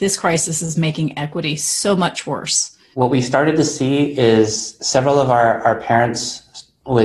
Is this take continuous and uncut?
no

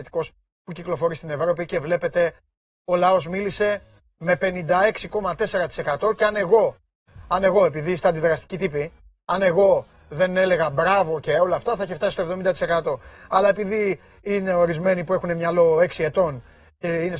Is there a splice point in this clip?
no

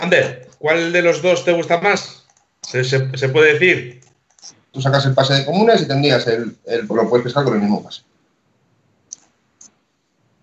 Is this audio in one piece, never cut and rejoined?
no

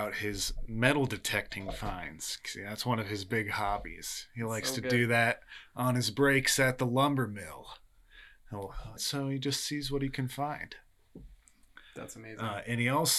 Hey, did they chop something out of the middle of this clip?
yes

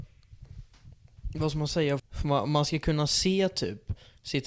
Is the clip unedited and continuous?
no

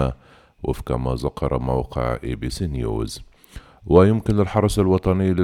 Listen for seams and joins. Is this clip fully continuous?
yes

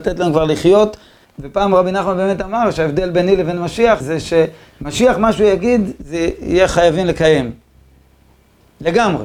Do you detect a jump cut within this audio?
yes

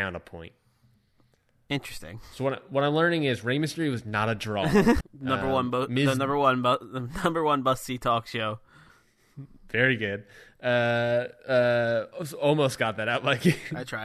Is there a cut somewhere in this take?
yes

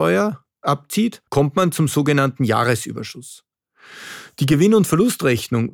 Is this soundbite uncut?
no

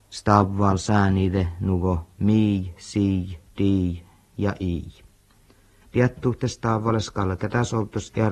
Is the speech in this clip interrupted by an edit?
yes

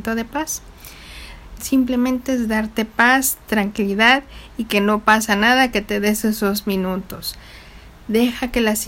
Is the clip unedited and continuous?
no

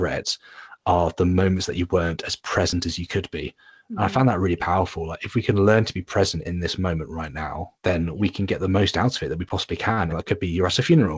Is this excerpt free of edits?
no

